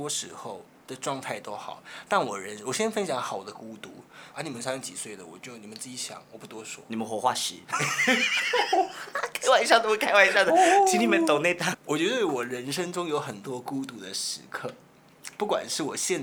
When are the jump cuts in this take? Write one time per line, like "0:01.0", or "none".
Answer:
0:04.3
0:11.7

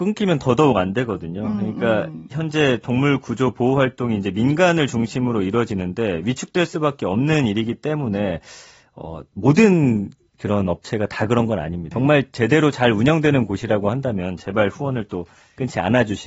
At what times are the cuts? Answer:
0:11.9

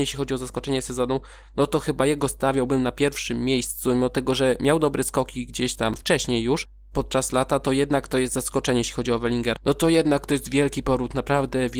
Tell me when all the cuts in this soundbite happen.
0:09.6

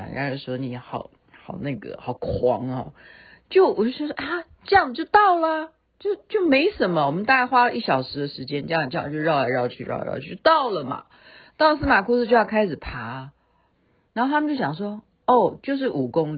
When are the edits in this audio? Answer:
none

